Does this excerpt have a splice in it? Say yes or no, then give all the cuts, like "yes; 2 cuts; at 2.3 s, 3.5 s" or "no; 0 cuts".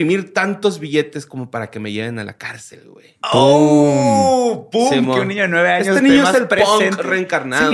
no; 0 cuts